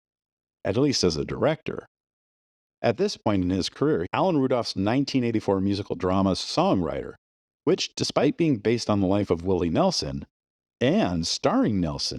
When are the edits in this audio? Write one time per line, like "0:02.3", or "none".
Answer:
0:04.1